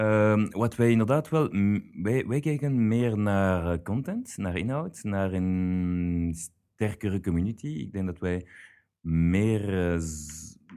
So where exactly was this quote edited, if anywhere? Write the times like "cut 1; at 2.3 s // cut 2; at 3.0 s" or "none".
none